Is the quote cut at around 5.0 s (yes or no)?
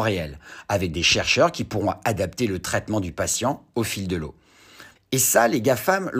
yes